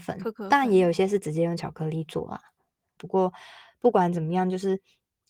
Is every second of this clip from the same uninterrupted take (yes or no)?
no